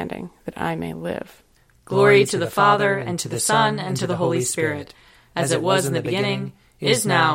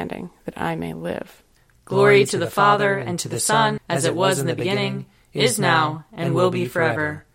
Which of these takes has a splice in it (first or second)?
second